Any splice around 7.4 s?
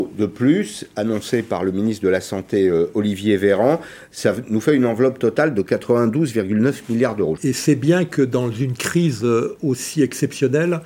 yes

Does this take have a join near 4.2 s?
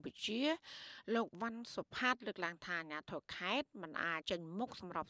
yes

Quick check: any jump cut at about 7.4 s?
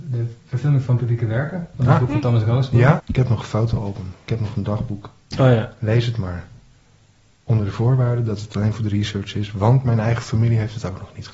no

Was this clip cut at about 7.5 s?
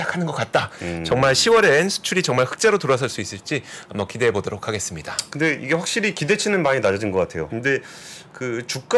yes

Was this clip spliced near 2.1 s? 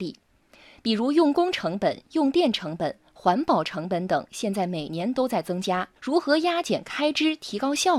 no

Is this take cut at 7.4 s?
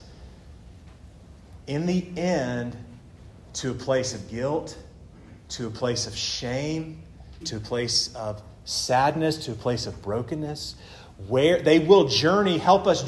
yes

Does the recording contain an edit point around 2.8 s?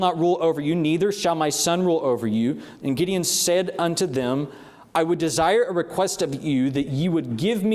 yes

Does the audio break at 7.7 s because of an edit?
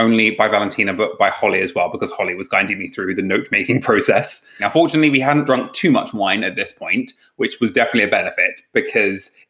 no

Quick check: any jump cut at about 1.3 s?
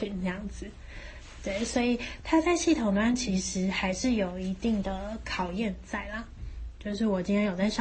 no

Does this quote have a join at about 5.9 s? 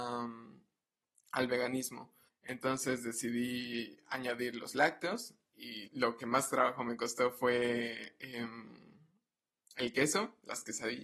yes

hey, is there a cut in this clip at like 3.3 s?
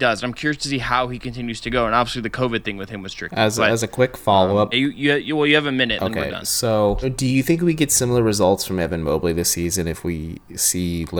no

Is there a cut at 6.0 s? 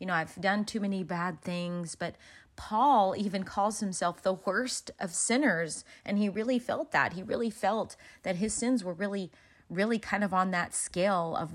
no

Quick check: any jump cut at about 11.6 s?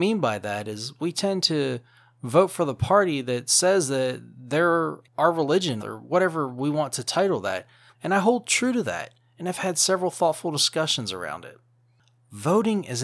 no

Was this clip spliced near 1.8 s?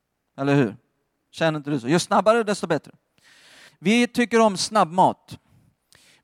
no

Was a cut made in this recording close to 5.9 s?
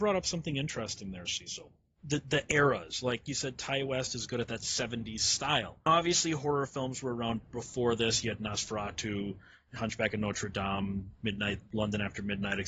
yes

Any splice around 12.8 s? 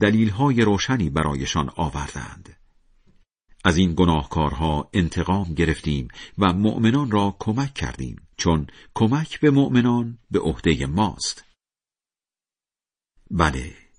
no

